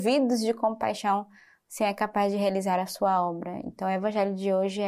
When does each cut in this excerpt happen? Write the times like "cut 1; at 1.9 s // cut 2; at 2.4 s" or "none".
none